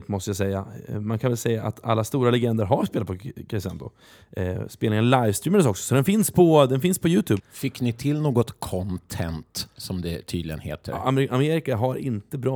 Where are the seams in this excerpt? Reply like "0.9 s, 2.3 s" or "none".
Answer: 7.4 s